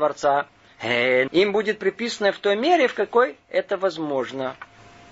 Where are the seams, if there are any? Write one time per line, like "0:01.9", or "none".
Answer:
0:01.3

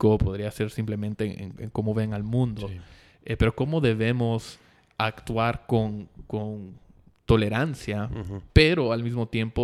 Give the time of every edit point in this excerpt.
none

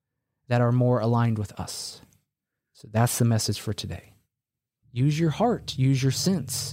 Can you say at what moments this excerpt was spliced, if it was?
0:04.8

